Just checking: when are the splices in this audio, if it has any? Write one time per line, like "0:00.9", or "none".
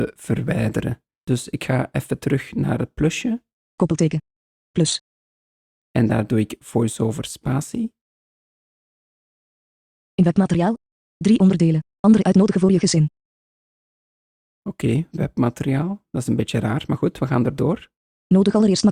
none

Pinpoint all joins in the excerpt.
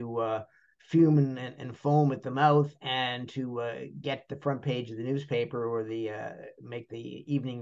none

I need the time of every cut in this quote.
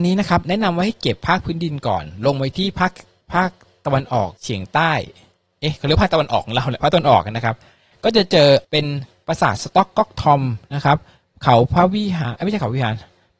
0:04.4
0:08.6

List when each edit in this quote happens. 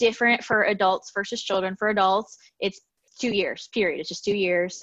none

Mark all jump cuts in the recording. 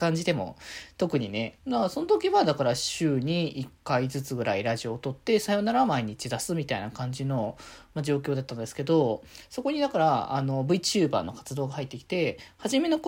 0:01.6

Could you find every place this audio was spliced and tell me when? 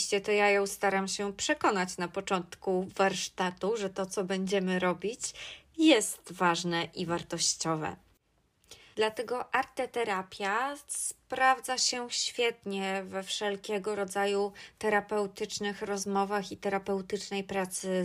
0:08.9

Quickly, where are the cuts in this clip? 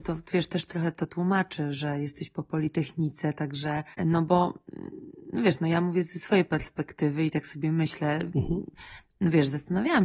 0:03.9

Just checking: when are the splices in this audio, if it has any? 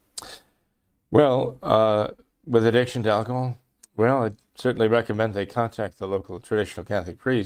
0:03.8

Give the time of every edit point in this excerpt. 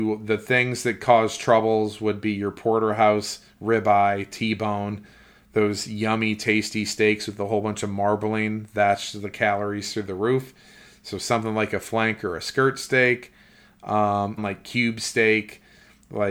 0:14.4

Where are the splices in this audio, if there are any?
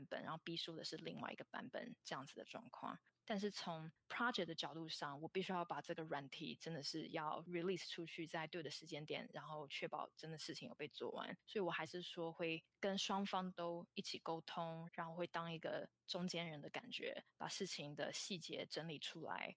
0:03.2
0:14.9

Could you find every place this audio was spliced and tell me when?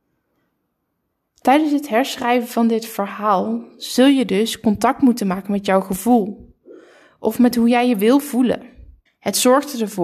0:09.1

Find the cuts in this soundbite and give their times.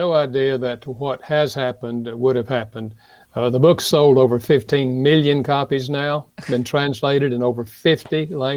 none

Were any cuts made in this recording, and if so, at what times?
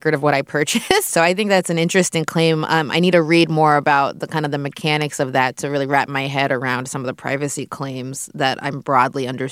0:01.1

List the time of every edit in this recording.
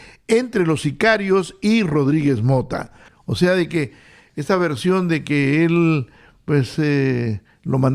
0:03.1

